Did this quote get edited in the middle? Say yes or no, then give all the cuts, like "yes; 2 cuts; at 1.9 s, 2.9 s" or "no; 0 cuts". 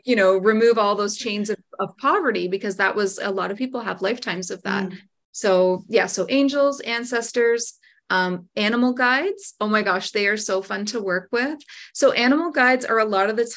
no; 0 cuts